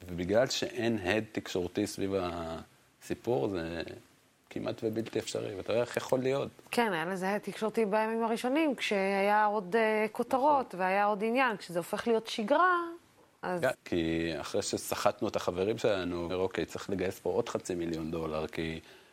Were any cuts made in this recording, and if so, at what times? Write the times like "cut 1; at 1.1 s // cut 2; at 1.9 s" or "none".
cut 1; at 13.7 s // cut 2; at 16.3 s